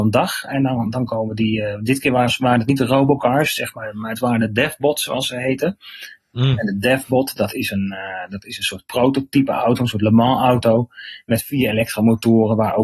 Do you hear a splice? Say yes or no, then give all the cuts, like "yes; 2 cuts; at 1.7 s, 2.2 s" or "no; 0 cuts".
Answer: no; 0 cuts